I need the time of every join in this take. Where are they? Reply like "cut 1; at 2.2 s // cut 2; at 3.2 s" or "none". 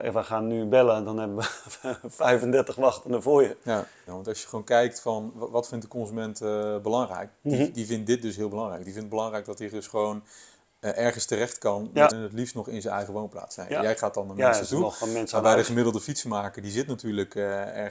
cut 1; at 4.1 s // cut 2; at 12.1 s